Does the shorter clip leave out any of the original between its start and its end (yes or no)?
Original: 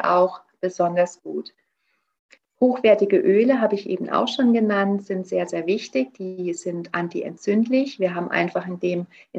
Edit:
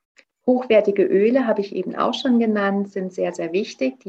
no